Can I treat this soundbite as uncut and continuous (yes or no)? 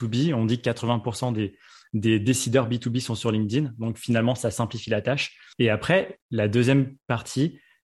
no